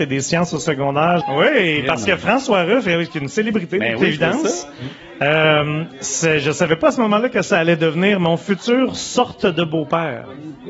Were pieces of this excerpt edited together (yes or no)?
yes